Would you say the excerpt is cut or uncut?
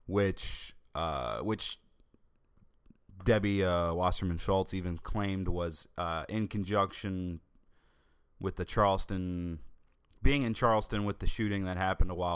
uncut